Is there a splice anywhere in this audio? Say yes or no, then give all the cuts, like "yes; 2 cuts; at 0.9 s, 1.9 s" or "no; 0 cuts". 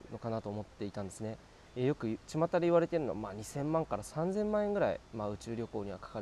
no; 0 cuts